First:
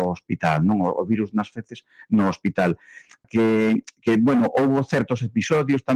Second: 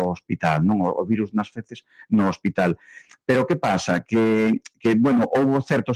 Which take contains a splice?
first; 1 cut; at 3.2 s

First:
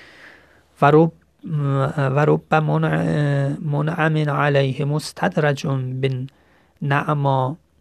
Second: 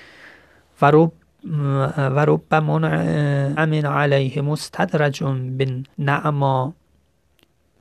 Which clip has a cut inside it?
second; 2 cuts; at 3.6 s, 5.9 s

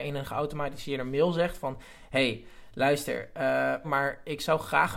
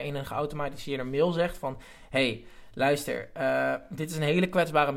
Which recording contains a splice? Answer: first; 1 cut; at 3.8 s

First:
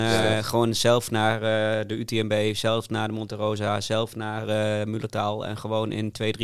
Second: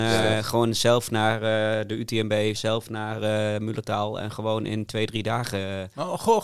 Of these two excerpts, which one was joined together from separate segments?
second; 1 cut; at 2.5 s

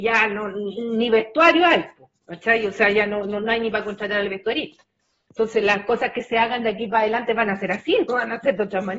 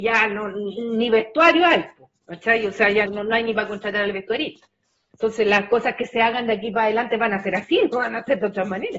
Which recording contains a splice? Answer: second; 1 cut; at 3.1 s

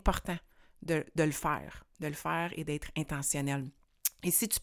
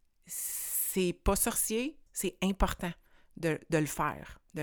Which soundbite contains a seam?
second; 1 cut; at 2.1 s

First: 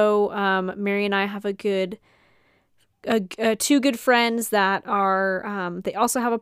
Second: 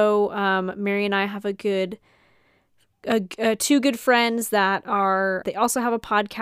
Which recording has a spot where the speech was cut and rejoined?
second; 1 cut; at 5.4 s

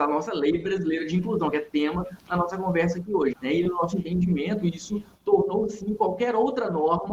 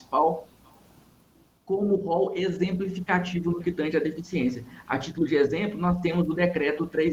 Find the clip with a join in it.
first; 1 cut; at 3.3 s

